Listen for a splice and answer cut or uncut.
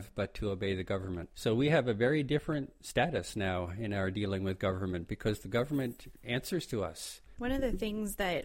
cut